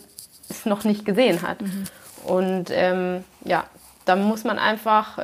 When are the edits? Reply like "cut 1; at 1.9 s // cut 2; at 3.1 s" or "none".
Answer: none